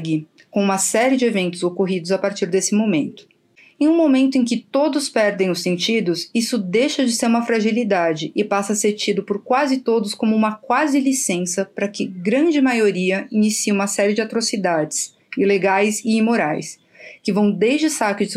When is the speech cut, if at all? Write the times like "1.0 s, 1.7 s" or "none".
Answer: none